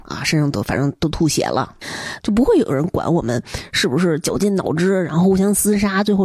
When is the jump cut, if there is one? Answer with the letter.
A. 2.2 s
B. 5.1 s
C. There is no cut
A